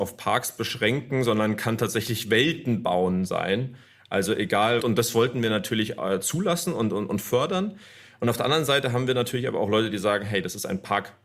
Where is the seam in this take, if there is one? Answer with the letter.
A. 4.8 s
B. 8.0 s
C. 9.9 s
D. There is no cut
A